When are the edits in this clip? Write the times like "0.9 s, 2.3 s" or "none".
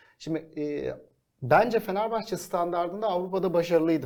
none